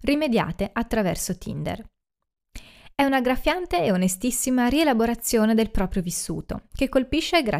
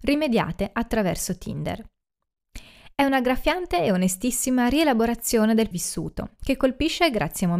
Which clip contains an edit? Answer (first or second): second